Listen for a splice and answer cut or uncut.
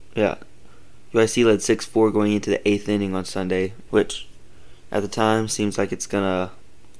cut